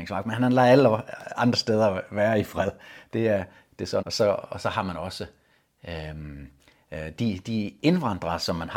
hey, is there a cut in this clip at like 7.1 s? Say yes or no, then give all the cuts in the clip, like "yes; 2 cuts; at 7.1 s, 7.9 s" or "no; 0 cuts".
no; 1 cut; at 4.0 s